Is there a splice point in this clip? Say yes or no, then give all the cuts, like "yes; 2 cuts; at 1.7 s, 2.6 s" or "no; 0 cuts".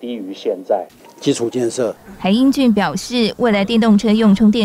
yes; 1 cut; at 1.0 s